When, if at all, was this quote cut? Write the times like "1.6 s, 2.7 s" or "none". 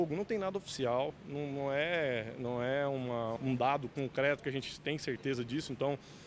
3.4 s